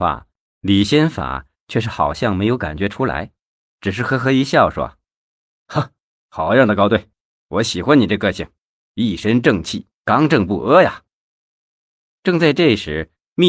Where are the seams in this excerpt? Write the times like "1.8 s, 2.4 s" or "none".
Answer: none